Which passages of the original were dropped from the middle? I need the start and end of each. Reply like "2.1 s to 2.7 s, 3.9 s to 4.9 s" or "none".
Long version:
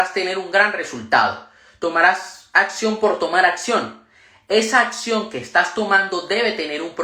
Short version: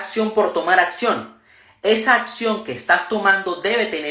none